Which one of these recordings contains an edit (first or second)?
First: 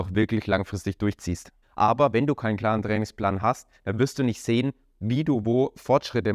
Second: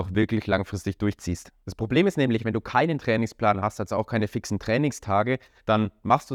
first